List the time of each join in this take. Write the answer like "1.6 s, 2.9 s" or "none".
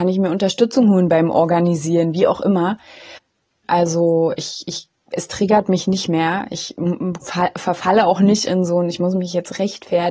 3.6 s